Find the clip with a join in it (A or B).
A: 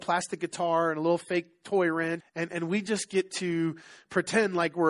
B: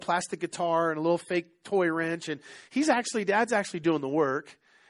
A